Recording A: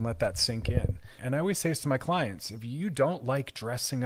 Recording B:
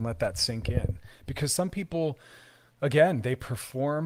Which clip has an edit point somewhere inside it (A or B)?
A